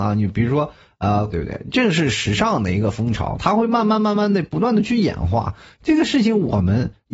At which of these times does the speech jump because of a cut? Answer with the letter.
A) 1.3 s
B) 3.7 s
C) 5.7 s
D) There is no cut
A